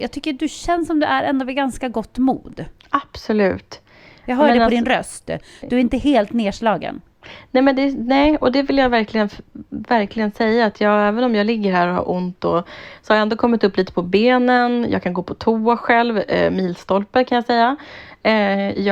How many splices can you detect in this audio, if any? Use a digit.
0